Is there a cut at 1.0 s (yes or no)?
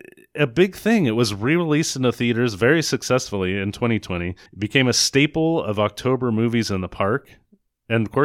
no